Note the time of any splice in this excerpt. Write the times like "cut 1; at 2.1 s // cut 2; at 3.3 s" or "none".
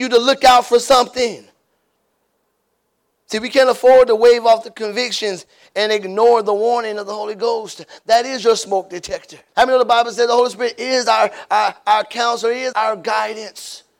cut 1; at 9.5 s // cut 2; at 12.7 s